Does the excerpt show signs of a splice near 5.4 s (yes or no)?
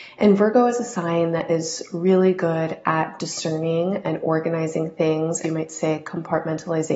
yes